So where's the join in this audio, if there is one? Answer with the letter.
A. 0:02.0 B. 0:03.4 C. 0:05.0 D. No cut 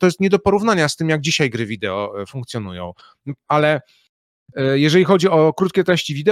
B